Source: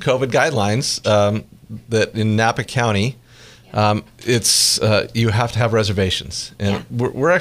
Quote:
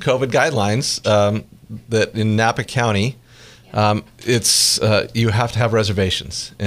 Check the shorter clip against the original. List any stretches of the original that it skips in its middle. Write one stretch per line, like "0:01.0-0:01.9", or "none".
none